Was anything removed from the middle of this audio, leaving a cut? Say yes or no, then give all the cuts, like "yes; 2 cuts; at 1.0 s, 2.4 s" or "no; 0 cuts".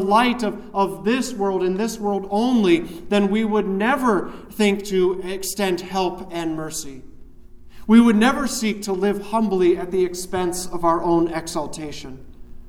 no; 0 cuts